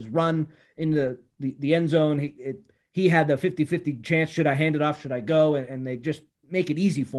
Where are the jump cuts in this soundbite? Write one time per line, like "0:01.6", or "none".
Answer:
none